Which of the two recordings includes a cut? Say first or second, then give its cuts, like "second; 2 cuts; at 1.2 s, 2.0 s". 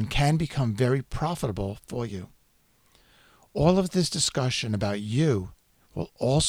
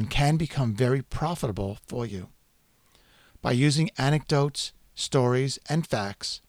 second; 1 cut; at 3.3 s